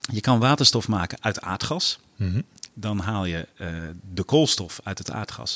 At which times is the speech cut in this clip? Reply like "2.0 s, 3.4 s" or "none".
none

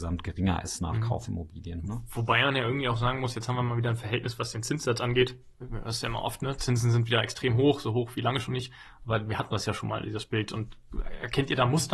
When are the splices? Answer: none

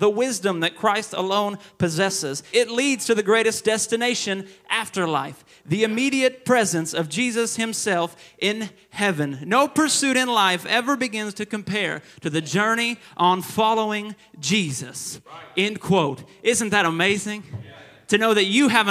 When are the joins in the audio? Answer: 2.5 s

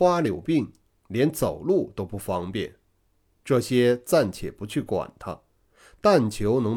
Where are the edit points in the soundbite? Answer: none

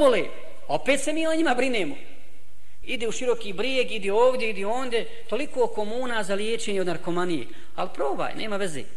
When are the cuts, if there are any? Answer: 2.8 s

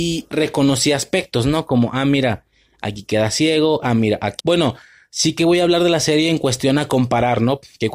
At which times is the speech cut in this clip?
4.4 s

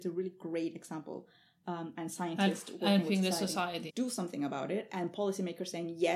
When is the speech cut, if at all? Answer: 1.9 s, 3.9 s

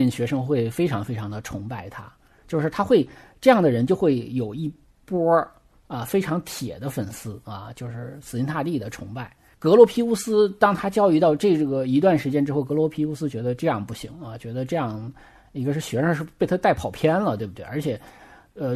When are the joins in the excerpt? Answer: none

